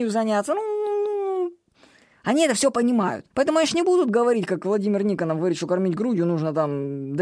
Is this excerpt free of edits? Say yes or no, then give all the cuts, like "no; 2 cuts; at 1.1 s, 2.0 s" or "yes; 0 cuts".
no; 1 cut; at 3.3 s